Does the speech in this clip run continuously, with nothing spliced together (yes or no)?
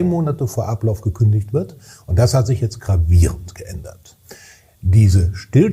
yes